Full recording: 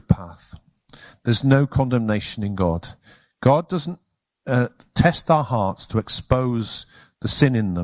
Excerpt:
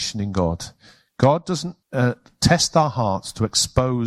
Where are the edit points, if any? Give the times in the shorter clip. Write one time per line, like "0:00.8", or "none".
0:01.8